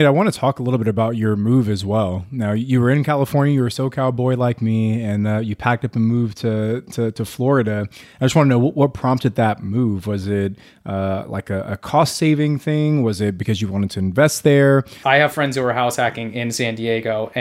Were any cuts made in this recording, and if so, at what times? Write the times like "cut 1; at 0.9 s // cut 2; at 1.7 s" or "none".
cut 1; at 15.0 s

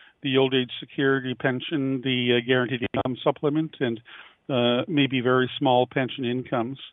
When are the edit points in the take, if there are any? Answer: none

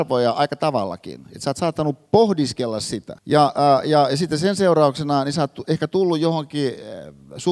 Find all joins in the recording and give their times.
cut 1; at 3.2 s

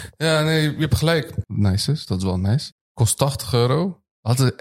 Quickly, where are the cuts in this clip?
cut 1; at 1.4 s // cut 2; at 2.7 s

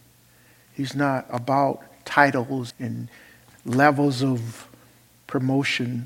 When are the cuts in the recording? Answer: cut 1; at 2.7 s

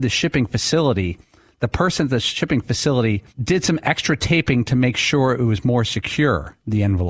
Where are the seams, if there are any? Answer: cut 1; at 3.3 s

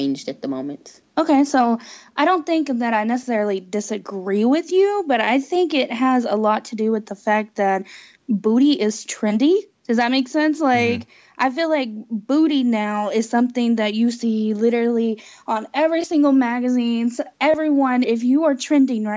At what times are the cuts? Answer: cut 1; at 18.0 s

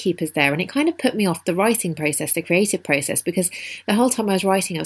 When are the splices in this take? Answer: none

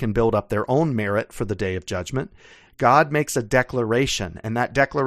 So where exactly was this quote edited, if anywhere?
cut 1; at 2.6 s

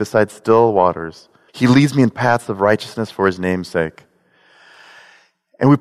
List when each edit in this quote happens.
cut 1; at 1.5 s

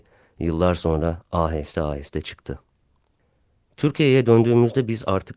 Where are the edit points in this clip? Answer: none

